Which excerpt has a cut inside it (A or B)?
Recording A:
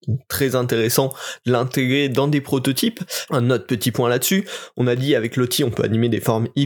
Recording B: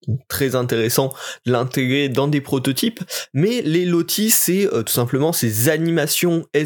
A